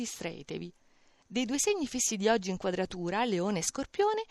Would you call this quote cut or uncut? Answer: cut